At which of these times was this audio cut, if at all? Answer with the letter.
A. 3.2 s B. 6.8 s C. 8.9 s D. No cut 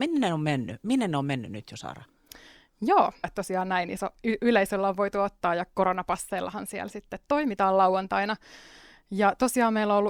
A